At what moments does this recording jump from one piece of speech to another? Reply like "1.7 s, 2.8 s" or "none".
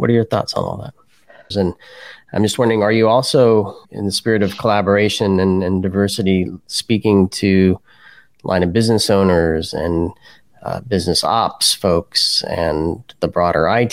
1.5 s, 3.8 s